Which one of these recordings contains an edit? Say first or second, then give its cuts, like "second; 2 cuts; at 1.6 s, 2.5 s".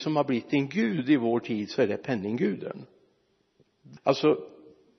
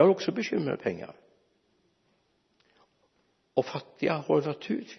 first; 1 cut; at 4.0 s